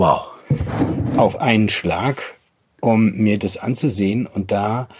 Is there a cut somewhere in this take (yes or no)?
no